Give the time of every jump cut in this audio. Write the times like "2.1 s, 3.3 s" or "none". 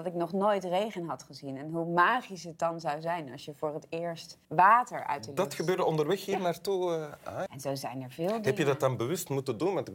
4.4 s, 7.5 s